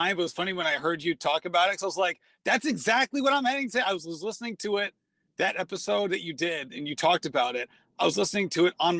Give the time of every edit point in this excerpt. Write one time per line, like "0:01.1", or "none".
none